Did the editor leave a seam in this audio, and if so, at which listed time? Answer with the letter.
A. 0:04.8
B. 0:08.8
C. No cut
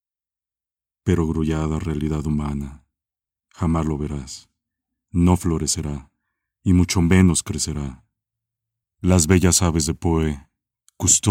B